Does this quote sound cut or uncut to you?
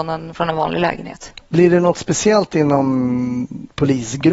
cut